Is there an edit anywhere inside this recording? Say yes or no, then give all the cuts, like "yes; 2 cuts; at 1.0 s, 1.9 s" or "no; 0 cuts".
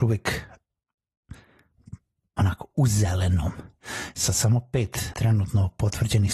yes; 1 cut; at 5.1 s